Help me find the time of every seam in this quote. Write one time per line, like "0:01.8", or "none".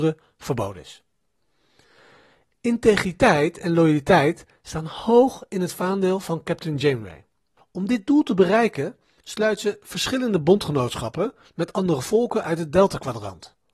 0:07.6